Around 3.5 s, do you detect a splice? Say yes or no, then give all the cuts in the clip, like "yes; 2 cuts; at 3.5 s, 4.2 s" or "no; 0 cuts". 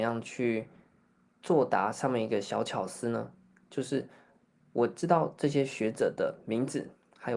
no; 0 cuts